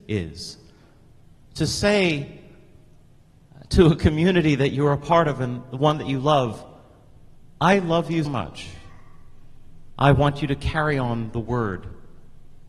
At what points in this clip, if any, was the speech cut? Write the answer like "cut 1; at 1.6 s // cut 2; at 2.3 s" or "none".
cut 1; at 8.3 s